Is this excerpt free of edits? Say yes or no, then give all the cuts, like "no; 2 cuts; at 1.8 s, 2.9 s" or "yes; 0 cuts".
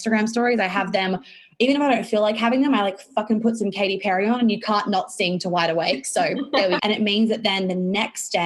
no; 1 cut; at 6.8 s